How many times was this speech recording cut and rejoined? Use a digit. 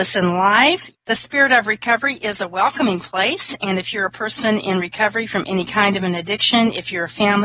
1